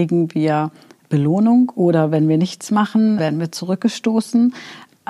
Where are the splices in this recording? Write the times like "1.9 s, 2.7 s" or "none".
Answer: 3.2 s